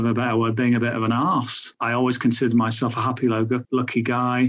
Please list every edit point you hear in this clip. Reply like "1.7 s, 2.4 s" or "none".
1.8 s